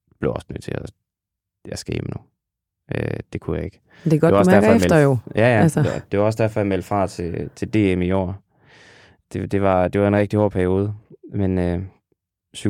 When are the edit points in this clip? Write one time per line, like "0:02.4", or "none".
none